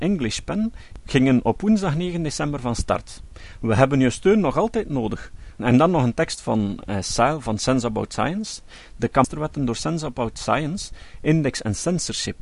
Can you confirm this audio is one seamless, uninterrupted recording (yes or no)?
no